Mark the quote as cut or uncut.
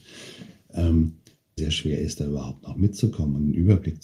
cut